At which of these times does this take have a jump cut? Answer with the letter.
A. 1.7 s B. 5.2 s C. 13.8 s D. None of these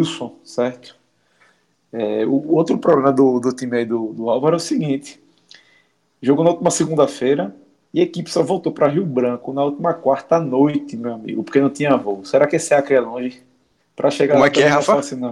C